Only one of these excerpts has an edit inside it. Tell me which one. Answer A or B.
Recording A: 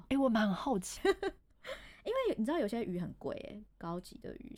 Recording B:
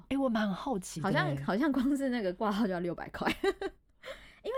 A